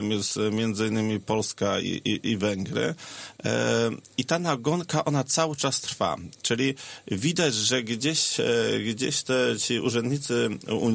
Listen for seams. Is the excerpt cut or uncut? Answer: uncut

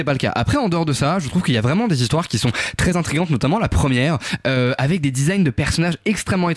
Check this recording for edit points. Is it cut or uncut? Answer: uncut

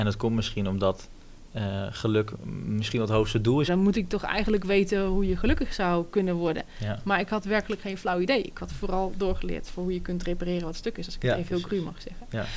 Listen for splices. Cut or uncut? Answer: cut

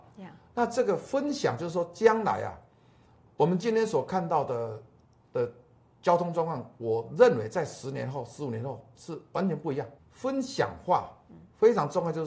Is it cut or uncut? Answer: cut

